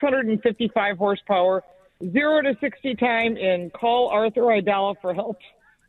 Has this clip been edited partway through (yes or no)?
no